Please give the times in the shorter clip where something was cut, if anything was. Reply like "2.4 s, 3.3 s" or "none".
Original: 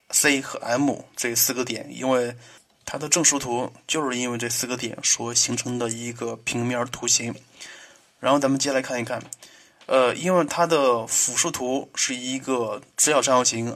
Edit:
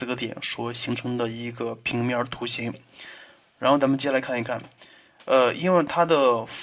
none